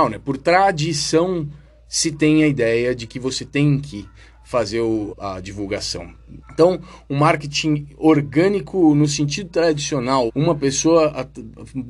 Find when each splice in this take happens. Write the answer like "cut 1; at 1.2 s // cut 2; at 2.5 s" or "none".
cut 1; at 5.1 s // cut 2; at 6.4 s // cut 3; at 10.3 s